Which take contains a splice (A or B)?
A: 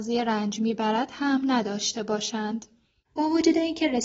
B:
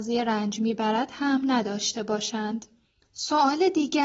B